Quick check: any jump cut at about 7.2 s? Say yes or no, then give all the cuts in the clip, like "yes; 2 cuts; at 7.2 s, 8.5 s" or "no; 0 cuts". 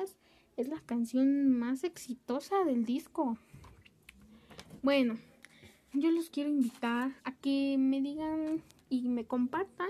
yes; 2 cuts; at 5.9 s, 7.2 s